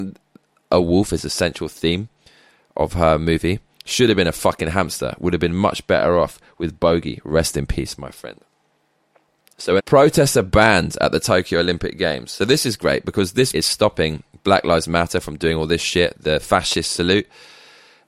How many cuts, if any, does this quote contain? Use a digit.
2